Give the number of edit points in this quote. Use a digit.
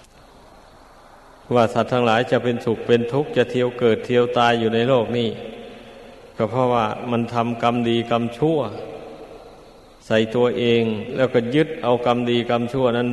0